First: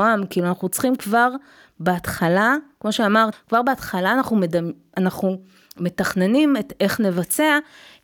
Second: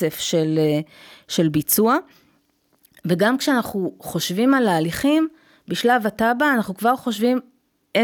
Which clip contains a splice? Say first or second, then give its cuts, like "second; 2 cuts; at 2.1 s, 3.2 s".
first; 1 cut; at 3.3 s